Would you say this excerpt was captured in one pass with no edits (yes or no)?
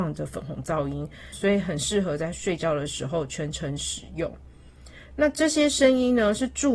no